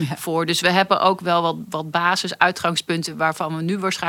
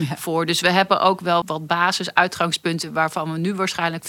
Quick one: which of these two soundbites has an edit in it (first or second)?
second